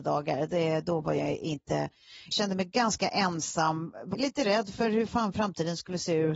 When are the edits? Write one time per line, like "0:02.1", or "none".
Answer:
0:02.3
0:04.1